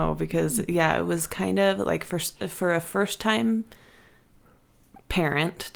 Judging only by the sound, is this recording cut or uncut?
uncut